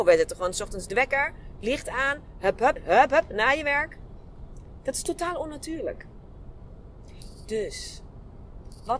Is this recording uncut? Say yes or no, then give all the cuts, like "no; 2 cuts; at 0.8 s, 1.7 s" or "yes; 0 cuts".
no; 1 cut; at 2.8 s